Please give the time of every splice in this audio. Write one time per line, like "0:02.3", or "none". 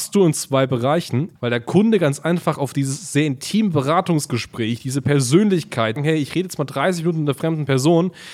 0:01.4
0:06.0